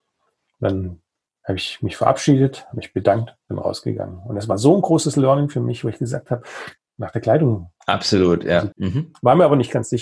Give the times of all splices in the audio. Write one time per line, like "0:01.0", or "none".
0:06.8
0:08.7